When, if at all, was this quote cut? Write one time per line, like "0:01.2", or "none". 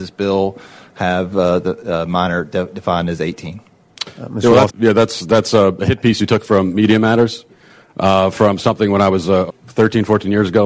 0:04.7
0:09.5